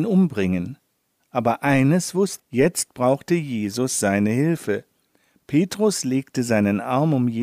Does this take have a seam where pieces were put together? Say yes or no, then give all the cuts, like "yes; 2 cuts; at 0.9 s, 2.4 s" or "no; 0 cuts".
yes; 2 cuts; at 1.2 s, 2.4 s